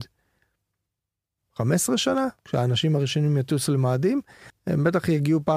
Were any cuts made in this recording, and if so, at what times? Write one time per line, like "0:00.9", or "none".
0:02.4
0:04.5